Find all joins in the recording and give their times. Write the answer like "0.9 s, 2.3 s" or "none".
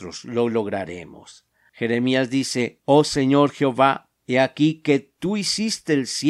1.7 s